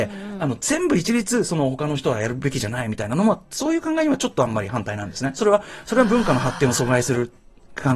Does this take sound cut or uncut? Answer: uncut